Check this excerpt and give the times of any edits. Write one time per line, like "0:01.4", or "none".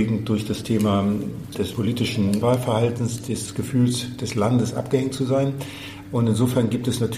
0:06.0